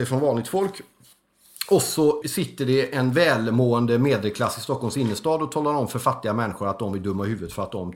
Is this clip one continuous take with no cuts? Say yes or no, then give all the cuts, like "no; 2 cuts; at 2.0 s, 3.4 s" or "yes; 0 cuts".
no; 1 cut; at 2.2 s